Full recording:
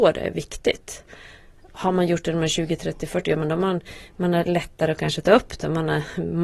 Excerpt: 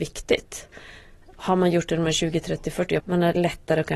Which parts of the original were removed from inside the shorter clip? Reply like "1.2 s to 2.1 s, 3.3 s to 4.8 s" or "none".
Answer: 3.3 s to 4.1 s